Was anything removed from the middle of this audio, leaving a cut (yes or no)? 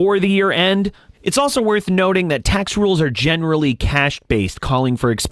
yes